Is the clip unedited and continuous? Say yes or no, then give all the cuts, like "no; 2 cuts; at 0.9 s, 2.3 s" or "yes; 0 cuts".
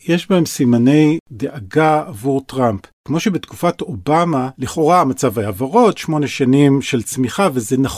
yes; 0 cuts